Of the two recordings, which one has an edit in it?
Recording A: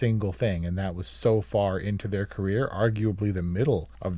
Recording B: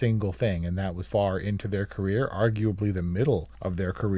B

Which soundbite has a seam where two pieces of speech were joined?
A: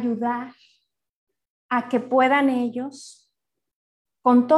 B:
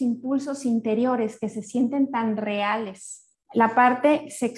B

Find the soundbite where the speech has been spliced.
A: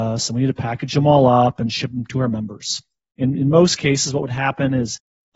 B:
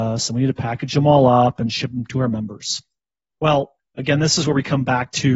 A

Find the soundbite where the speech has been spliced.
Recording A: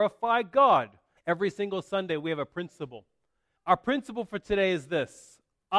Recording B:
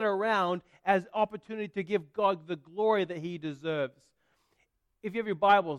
A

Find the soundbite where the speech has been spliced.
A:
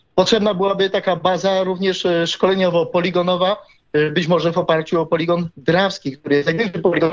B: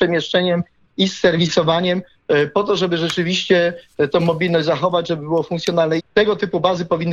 B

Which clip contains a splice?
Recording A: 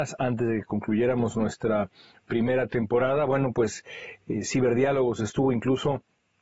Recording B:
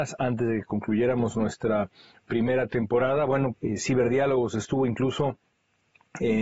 B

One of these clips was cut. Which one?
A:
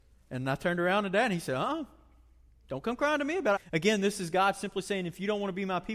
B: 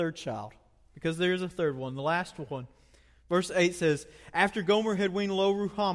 A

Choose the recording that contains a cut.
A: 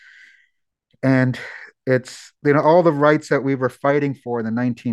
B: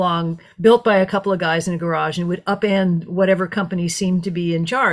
A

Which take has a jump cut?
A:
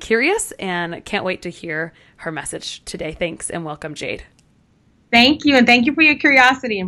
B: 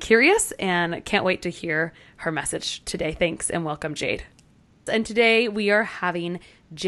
B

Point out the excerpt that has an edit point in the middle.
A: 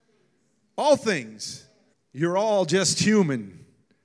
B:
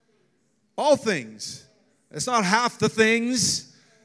A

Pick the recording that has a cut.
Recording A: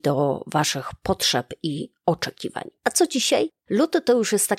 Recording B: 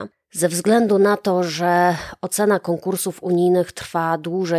A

